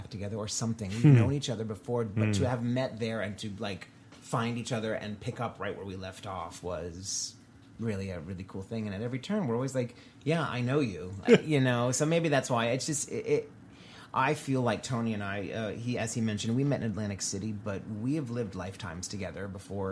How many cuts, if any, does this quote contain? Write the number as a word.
one